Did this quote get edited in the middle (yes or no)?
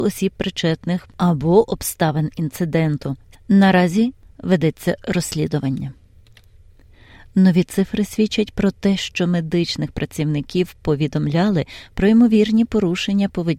no